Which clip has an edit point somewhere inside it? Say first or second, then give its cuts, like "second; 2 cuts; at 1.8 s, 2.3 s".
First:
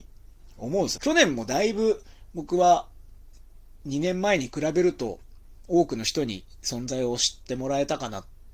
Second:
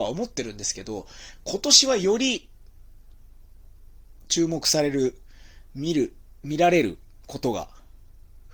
first; 1 cut; at 1.0 s